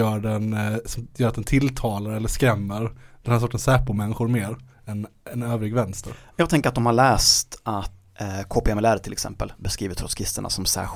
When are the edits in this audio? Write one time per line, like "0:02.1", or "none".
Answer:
none